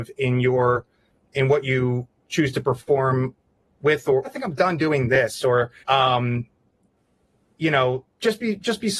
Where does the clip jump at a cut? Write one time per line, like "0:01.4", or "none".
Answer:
0:04.2
0:05.8
0:08.1